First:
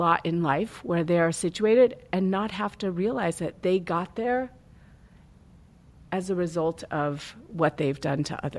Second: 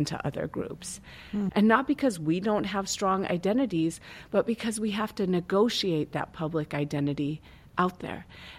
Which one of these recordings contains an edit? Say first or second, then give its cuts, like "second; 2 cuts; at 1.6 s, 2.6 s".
second; 1 cut; at 1.5 s